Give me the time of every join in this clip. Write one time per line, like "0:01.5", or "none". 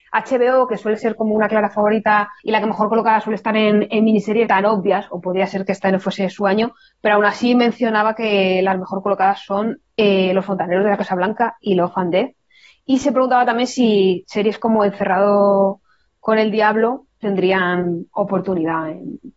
0:02.4
0:04.5